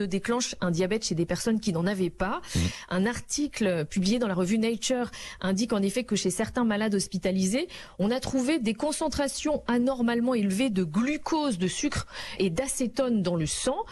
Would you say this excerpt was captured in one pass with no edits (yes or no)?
yes